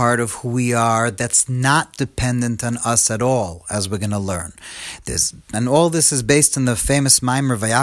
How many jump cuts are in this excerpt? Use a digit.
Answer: 1